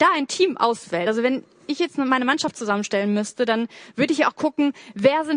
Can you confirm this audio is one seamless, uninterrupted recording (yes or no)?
yes